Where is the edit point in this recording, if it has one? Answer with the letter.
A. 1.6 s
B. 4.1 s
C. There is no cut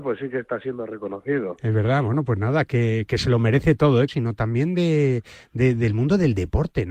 B